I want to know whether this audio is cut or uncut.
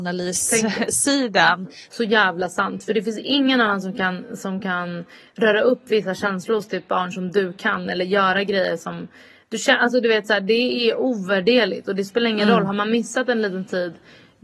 cut